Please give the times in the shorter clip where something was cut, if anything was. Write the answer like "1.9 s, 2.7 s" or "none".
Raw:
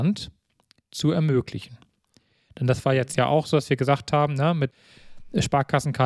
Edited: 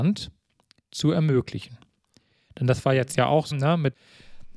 3.5 s